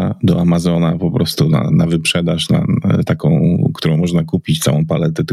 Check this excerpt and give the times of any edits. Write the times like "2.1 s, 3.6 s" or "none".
none